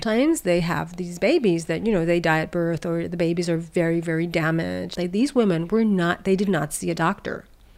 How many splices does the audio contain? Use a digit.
1